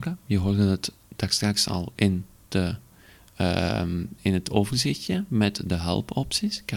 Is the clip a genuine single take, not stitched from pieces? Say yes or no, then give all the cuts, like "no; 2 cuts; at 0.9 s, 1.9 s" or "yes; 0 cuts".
yes; 0 cuts